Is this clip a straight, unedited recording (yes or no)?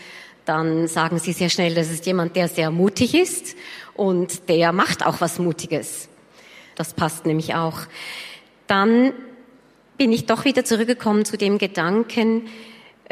no